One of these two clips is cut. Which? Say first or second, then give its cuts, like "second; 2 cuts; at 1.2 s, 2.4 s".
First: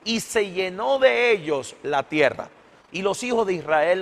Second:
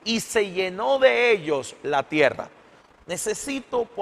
first; 1 cut; at 2.9 s